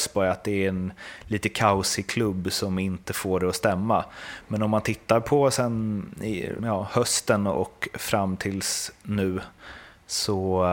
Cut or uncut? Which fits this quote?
cut